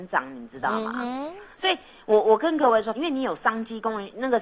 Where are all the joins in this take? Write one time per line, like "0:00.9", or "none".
0:02.9